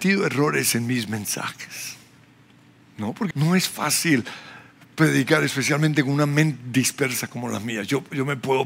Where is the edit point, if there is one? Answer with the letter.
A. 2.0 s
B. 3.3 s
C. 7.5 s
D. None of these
B